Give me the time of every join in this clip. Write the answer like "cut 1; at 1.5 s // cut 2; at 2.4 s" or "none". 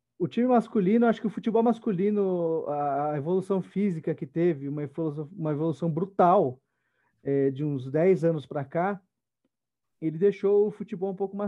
none